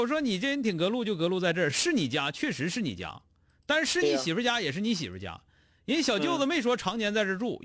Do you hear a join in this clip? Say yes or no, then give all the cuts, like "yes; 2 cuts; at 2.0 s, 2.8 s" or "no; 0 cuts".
no; 0 cuts